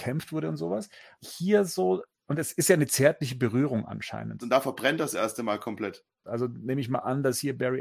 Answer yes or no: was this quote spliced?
yes